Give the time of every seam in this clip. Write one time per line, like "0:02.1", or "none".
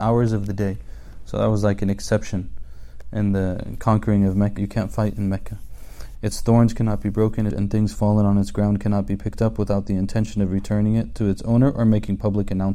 0:04.6
0:06.1
0:07.5